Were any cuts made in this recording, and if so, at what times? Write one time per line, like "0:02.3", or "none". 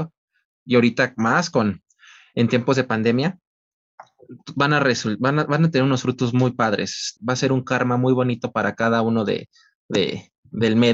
0:07.2